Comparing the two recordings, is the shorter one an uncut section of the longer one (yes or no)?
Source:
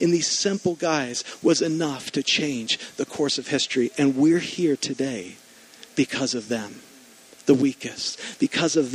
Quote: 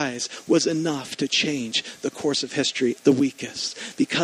no